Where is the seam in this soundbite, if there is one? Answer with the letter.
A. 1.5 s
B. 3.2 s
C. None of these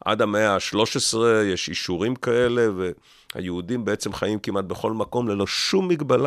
C